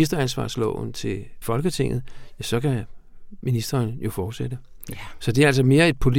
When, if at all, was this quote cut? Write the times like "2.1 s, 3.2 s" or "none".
none